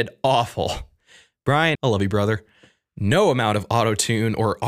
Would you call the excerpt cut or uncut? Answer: cut